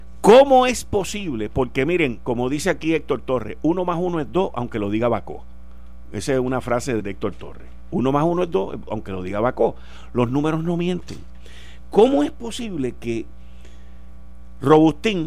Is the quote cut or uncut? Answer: cut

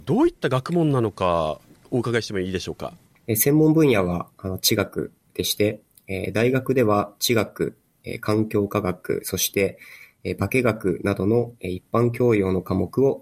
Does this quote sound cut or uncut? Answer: cut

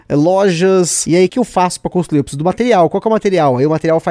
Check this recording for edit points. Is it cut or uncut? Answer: cut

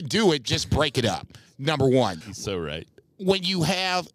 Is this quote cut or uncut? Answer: cut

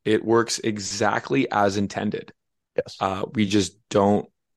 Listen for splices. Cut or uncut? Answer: uncut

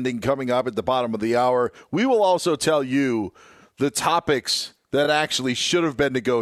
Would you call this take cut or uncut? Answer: uncut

